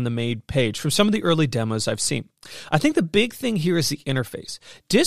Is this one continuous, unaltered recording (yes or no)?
yes